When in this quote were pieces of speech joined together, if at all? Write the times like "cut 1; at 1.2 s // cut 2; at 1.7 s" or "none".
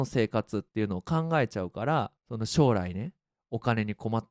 cut 1; at 2.2 s